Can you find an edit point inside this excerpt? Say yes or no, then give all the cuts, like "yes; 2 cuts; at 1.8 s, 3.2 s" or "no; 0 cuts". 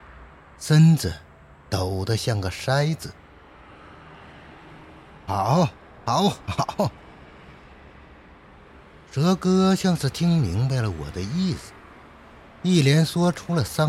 no; 0 cuts